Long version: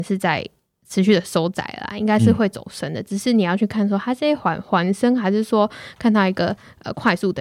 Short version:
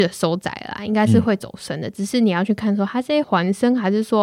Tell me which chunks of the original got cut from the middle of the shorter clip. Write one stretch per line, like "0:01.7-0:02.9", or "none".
0:04.4-0:04.6